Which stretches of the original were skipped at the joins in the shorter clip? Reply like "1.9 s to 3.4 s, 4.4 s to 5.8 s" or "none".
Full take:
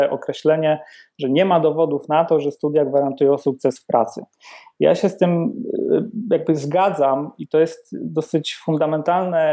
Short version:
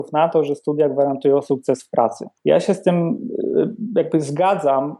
4.3 s to 4.7 s